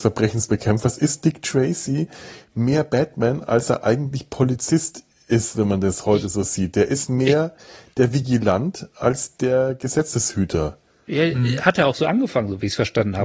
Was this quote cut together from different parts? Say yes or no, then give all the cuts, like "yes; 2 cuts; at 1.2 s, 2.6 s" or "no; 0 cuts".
no; 0 cuts